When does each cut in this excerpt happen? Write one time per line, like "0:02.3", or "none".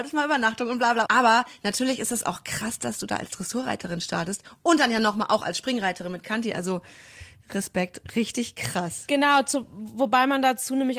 0:01.1